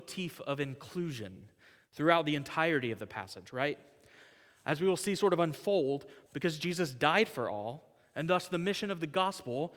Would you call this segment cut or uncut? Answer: cut